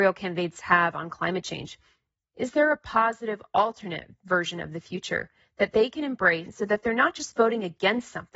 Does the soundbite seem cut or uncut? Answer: cut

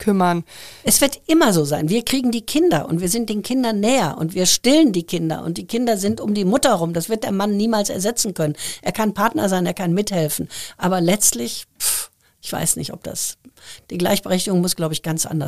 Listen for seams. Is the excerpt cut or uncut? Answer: uncut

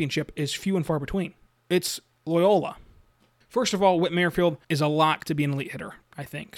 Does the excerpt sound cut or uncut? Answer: cut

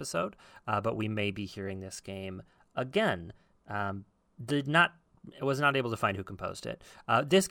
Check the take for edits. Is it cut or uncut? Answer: uncut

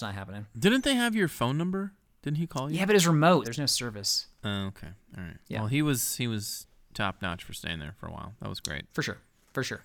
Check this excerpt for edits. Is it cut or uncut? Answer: cut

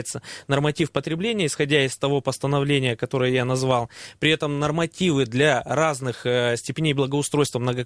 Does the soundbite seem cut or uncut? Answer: uncut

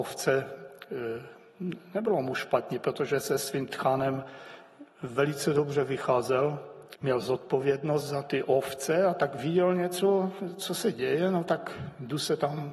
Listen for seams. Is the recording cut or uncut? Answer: cut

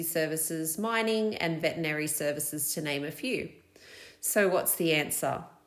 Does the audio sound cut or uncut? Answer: uncut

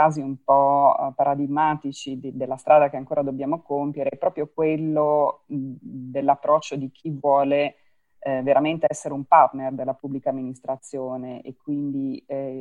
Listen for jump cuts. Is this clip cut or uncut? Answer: uncut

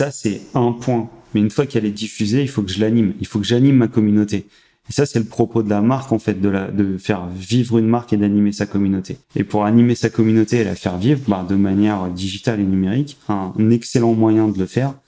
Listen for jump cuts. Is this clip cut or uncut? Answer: cut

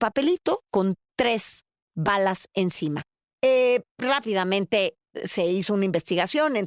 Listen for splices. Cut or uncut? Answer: uncut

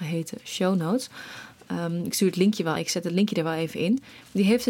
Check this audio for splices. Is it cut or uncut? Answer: uncut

